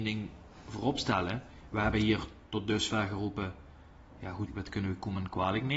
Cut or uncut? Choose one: cut